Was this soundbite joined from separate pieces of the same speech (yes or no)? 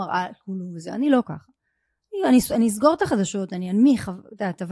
no